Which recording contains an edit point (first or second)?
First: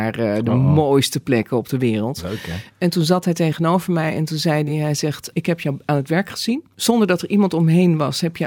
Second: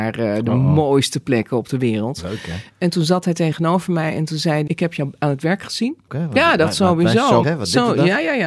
second